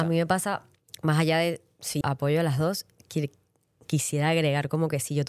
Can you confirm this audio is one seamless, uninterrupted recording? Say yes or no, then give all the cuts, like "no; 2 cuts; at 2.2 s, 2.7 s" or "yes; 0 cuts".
no; 1 cut; at 2.0 s